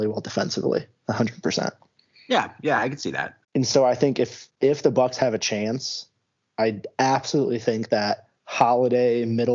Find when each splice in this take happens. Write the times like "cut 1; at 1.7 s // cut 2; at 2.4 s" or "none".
cut 1; at 3.4 s